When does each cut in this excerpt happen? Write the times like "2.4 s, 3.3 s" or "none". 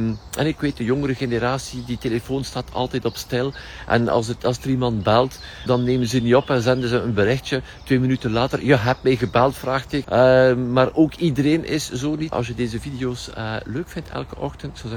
5.7 s, 10.0 s, 12.3 s